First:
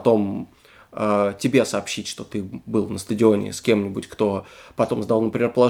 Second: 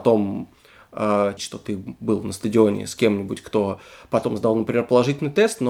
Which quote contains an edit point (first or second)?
second